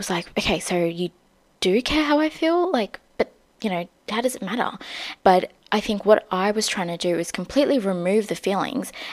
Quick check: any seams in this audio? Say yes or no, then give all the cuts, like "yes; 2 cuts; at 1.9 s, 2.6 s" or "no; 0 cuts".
yes; 1 cut; at 5.2 s